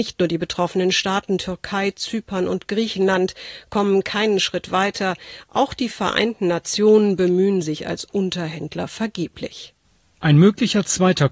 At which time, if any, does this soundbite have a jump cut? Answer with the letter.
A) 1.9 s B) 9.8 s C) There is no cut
C